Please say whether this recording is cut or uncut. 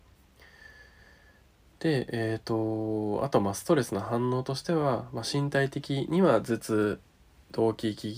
uncut